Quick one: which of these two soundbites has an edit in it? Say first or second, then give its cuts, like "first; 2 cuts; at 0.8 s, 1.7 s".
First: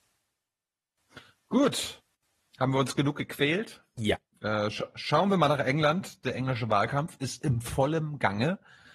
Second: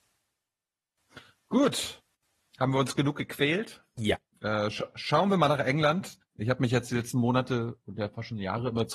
second; 1 cut; at 6.2 s